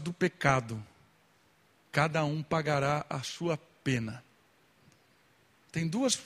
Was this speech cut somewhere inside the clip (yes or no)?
no